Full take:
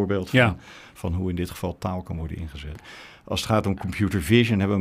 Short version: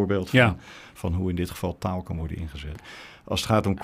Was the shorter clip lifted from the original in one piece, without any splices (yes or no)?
yes